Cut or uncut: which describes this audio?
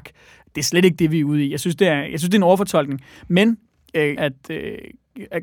cut